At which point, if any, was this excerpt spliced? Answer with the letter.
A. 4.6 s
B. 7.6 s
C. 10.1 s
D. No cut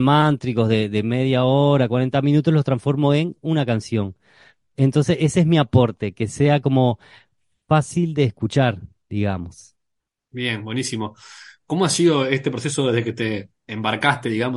D